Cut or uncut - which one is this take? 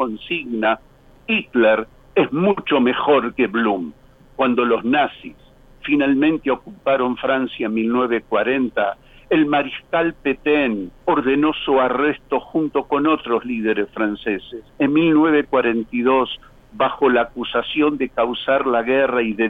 cut